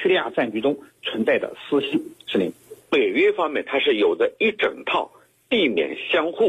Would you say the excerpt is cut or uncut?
cut